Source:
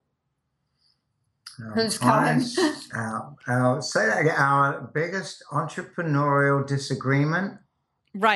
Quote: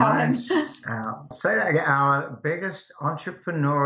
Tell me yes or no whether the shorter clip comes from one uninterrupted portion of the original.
no